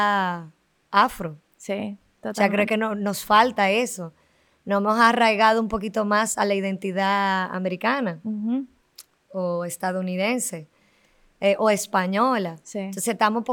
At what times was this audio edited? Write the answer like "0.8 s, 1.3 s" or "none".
none